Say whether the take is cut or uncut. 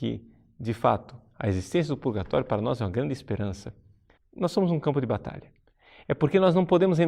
cut